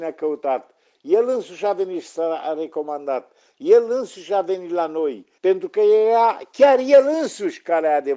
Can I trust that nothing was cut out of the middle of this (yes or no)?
no